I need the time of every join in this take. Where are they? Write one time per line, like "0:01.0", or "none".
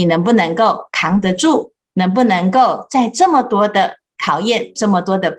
none

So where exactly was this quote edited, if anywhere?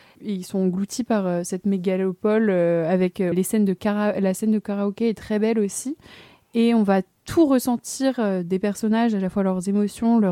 0:03.3

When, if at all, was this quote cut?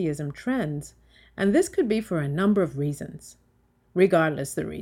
none

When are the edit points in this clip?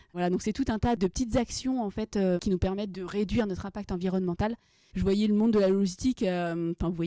0:04.9

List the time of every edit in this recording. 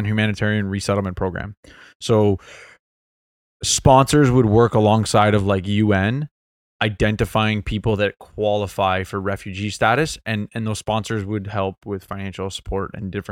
none

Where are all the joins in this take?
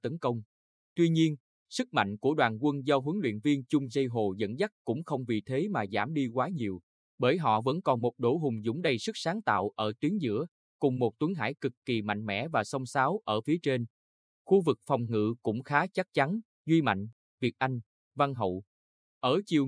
0:16.6

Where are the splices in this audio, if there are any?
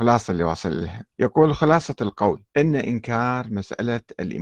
0:01.1
0:02.5

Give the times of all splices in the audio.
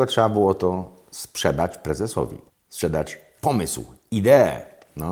0:02.5

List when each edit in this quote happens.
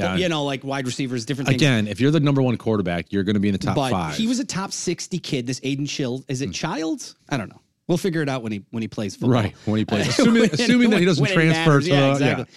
0:07.2

